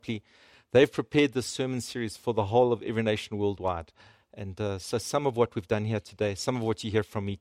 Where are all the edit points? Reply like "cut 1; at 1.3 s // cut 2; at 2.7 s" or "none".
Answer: none